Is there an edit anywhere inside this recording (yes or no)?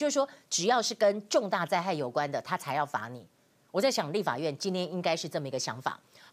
no